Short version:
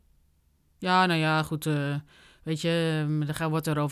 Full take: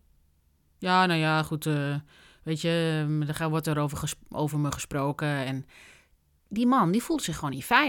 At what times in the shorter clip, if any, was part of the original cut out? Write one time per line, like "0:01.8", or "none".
none

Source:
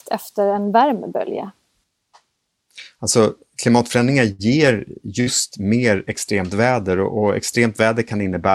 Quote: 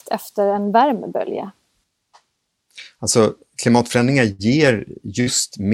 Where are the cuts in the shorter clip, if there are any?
none

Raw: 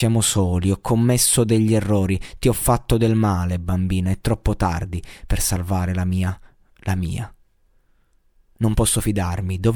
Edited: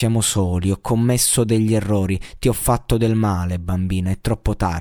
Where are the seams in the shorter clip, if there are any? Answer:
none

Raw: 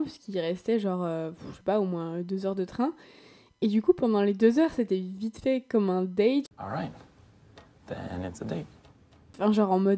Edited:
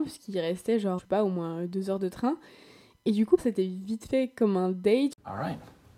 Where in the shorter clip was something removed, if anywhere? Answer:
0:01.0
0:03.4

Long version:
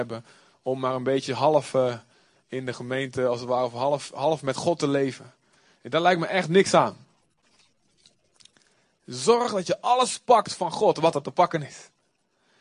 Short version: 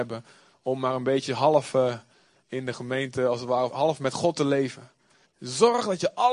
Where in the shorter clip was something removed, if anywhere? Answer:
0:03.7
0:05.2

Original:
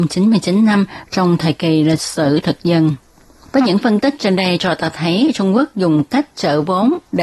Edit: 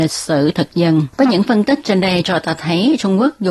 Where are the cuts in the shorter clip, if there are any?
0:01.1

